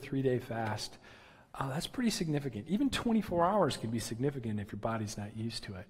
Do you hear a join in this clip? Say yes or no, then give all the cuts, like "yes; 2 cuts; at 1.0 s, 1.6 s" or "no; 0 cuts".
no; 0 cuts